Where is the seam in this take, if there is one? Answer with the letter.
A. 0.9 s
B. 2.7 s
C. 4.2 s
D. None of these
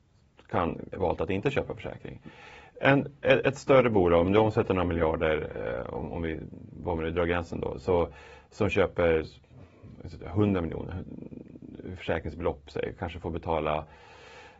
A